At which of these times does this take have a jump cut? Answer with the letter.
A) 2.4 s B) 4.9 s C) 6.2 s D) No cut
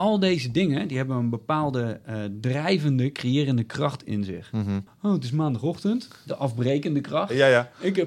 B